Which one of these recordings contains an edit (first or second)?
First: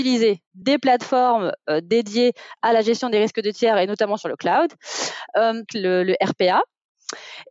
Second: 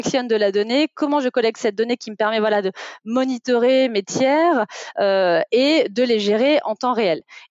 first